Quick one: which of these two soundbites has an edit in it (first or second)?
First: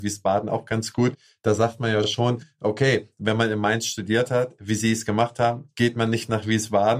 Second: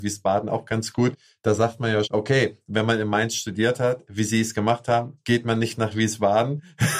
second